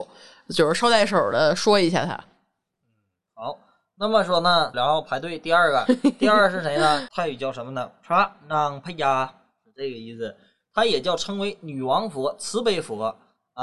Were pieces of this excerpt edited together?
yes; 2 cuts; at 4.7 s, 7.1 s

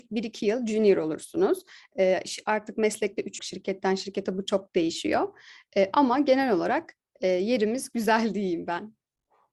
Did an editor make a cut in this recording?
yes; 1 cut; at 3.4 s

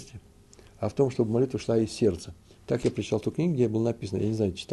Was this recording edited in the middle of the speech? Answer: no; 0 cuts

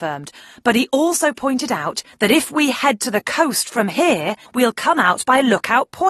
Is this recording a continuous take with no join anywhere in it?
no; 1 cut; at 4.4 s

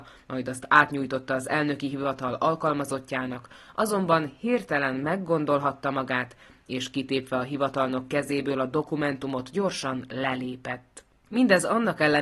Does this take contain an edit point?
yes; 1 cut; at 11.3 s

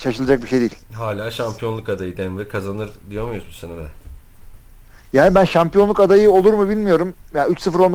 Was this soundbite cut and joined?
no; 0 cuts

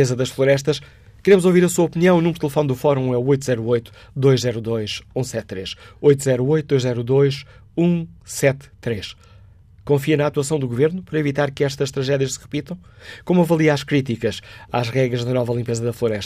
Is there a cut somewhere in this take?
no; 0 cuts

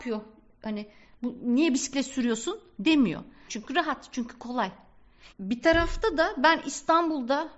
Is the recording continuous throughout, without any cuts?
no; 2 cuts; at 3.5 s, 5.3 s

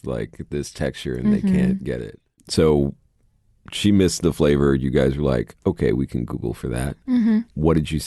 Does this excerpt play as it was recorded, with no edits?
yes; 0 cuts

